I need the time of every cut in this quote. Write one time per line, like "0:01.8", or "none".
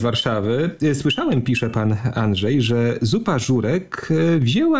none